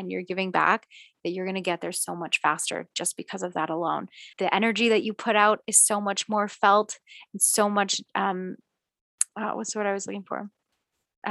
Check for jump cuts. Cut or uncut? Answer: cut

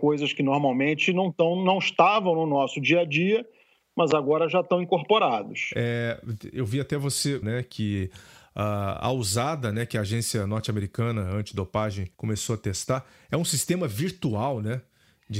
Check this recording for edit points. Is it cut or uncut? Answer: cut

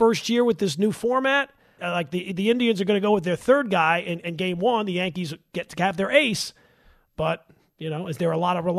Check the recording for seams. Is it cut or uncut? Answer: cut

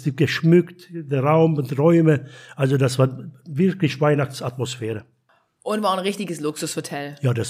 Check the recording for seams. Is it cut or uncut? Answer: uncut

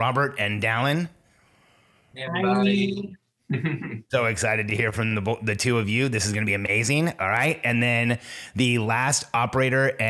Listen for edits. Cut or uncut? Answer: uncut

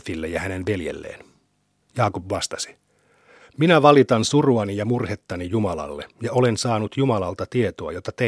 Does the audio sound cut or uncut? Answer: cut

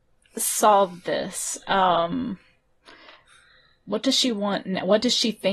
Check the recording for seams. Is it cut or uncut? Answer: uncut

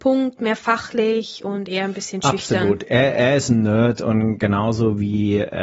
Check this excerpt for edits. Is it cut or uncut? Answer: uncut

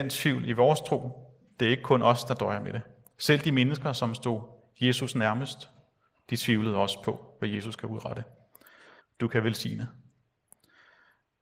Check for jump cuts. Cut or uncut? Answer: cut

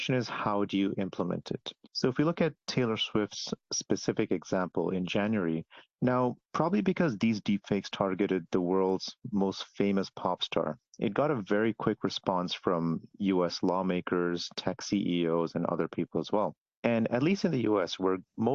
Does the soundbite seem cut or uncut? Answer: uncut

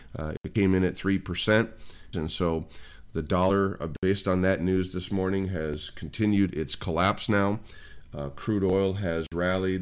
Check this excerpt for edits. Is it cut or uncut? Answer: cut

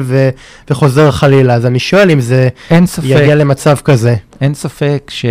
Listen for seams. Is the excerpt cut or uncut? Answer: uncut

